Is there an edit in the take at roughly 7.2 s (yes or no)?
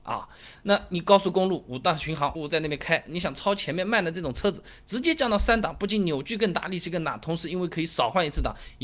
no